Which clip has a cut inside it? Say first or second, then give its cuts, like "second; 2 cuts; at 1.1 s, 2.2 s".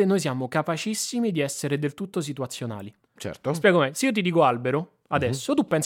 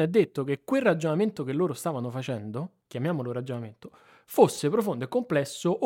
first; 1 cut; at 3.0 s